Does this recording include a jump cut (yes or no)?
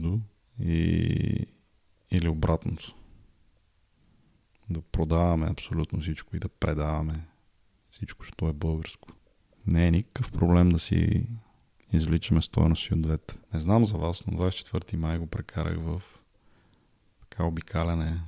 yes